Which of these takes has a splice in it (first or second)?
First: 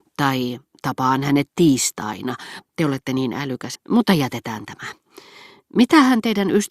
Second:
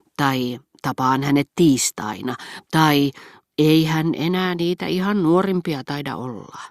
first